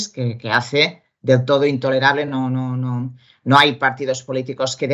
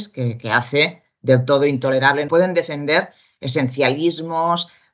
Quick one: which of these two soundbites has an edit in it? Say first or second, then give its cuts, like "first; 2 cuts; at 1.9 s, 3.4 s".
second; 1 cut; at 2.3 s